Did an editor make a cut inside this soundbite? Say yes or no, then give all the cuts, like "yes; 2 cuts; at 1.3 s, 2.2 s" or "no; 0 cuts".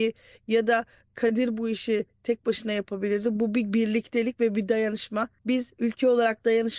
no; 0 cuts